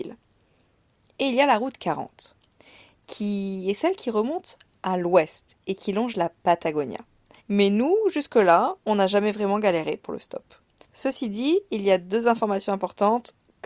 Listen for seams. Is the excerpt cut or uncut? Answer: cut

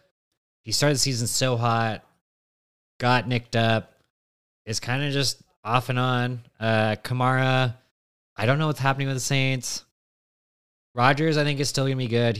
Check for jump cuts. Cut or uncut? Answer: uncut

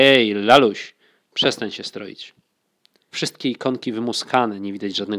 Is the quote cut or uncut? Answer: cut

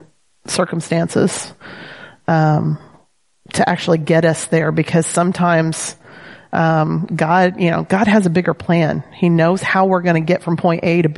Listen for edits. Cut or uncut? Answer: uncut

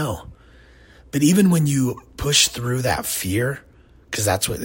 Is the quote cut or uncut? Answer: uncut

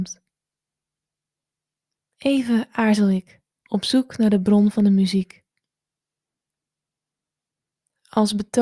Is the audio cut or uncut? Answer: cut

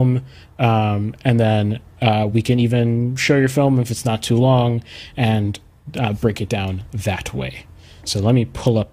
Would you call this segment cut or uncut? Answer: uncut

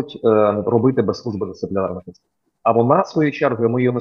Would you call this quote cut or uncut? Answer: uncut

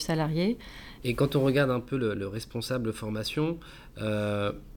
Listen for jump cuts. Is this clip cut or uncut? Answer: cut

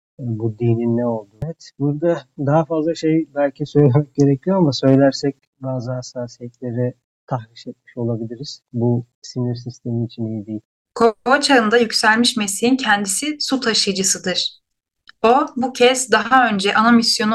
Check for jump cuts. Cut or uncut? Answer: cut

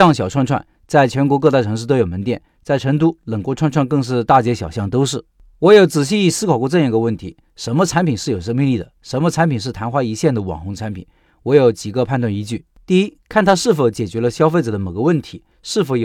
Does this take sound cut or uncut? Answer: uncut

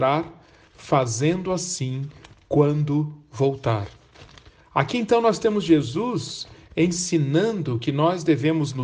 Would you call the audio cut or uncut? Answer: uncut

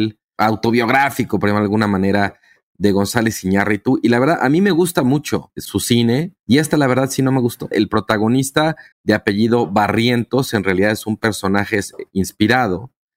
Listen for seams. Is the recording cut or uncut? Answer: cut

